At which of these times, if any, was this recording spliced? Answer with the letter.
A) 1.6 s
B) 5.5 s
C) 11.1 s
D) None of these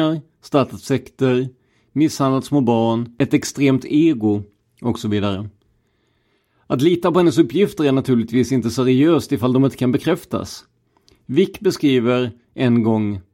D